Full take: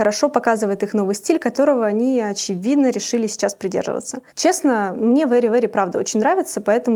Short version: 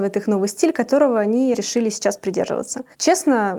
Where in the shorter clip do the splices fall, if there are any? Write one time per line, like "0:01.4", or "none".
0:01.5